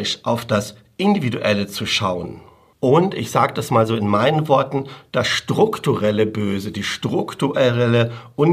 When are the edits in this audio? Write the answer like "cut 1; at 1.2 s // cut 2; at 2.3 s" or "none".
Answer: none